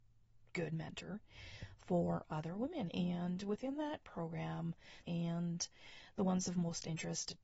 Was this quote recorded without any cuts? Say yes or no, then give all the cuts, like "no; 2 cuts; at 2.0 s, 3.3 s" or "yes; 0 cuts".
no; 2 cuts; at 2.9 s, 5.0 s